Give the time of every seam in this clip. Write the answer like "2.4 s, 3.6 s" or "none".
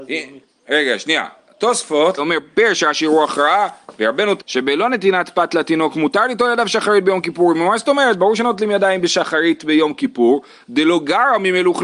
2.2 s, 4.4 s